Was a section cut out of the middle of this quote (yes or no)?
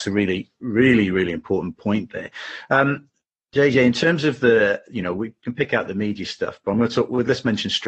no